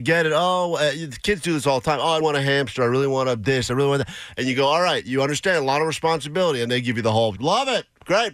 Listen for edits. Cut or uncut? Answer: cut